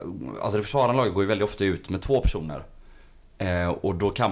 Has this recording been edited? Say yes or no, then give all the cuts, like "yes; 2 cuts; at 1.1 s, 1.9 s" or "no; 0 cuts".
no; 0 cuts